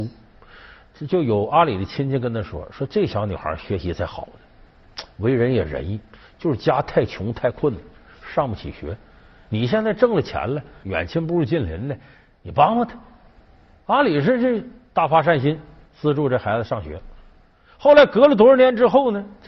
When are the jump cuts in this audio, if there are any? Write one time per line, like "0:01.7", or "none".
0:10.8